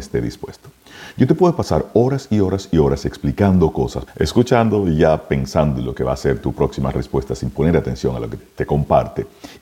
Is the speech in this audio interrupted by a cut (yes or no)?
yes